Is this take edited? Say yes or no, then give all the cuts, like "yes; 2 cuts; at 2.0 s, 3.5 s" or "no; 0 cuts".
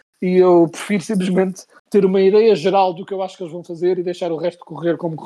no; 0 cuts